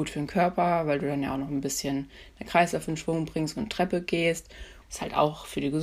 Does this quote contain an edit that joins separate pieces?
yes; 1 cut; at 4.8 s

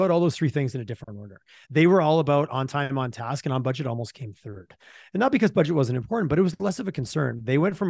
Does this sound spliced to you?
no; 0 cuts

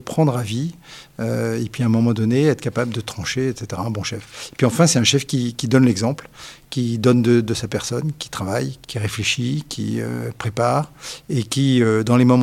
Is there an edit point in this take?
yes; 1 cut; at 8.8 s

